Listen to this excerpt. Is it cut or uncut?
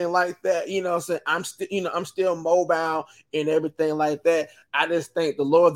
uncut